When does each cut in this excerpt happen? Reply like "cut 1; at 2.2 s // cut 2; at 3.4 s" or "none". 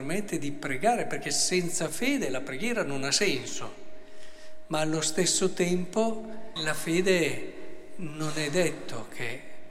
cut 1; at 6.6 s